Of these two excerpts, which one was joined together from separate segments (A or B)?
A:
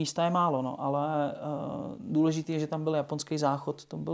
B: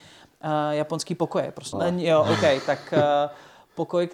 B